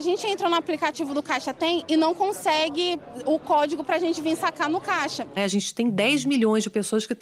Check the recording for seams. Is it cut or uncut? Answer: cut